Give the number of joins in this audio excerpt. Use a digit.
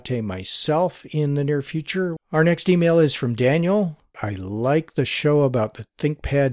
2